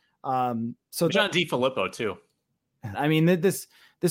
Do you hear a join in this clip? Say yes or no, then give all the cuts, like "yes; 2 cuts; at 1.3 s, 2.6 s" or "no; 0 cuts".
yes; 2 cuts; at 1.1 s, 2.9 s